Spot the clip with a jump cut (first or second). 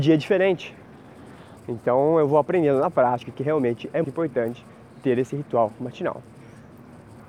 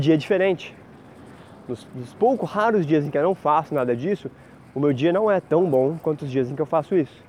first